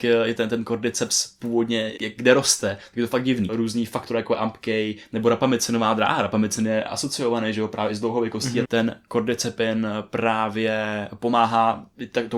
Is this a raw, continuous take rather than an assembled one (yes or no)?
no